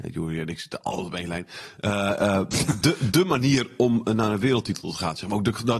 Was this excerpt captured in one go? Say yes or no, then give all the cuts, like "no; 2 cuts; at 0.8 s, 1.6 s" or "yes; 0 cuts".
no; 1 cut; at 2.8 s